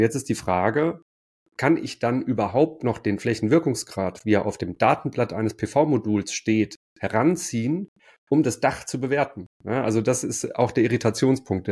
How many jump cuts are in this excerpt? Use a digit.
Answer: 0